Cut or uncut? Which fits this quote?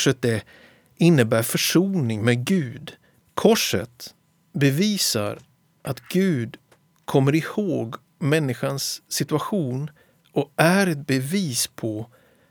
cut